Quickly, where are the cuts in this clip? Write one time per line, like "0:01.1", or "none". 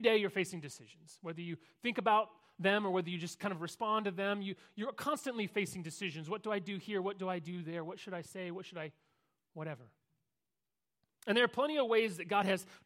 none